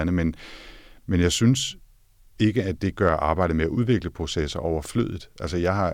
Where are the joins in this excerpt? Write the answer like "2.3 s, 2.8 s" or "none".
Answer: none